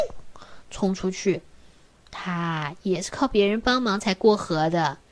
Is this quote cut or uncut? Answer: uncut